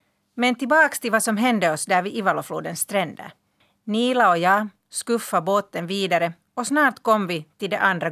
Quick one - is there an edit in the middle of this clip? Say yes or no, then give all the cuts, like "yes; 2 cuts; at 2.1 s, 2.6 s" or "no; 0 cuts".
no; 0 cuts